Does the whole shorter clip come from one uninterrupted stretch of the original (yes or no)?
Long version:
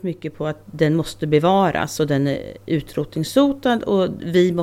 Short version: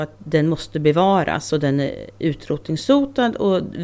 yes